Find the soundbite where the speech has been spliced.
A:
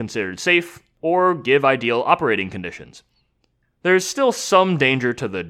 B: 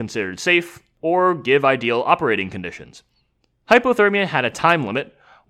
A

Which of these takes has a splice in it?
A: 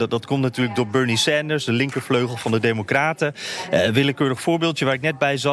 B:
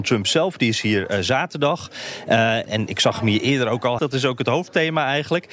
B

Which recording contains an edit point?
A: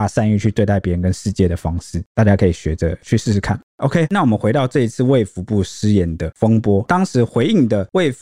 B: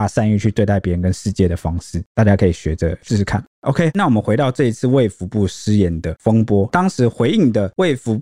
B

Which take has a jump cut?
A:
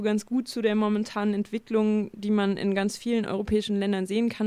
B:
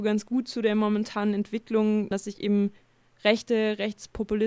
B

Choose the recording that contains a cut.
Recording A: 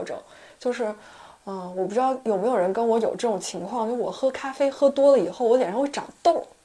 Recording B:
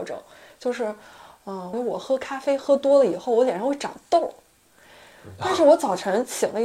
B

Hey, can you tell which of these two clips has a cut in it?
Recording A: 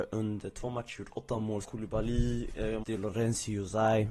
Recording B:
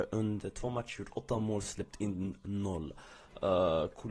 A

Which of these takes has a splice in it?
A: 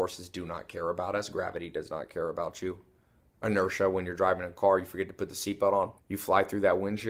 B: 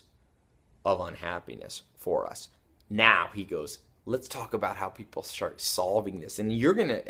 A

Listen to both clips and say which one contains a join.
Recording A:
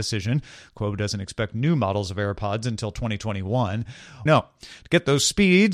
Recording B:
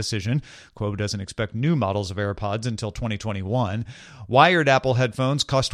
A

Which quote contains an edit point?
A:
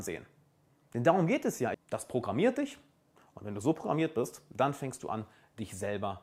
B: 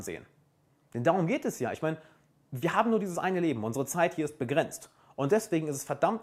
A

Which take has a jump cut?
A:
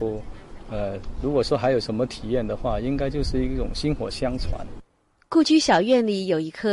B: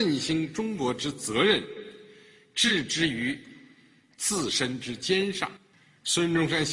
B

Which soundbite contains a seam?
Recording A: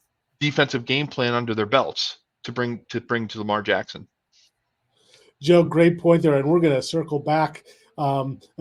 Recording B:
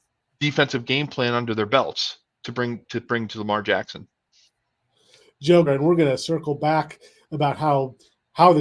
B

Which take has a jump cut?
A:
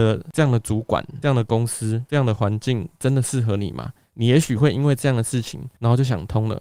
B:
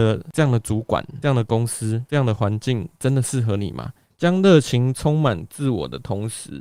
B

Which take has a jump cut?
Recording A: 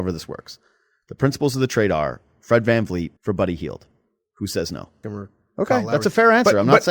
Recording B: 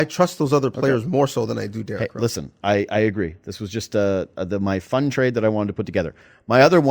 A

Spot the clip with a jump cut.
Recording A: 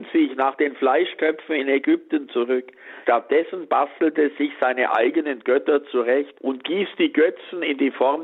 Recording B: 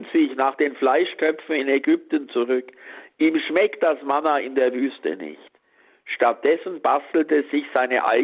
A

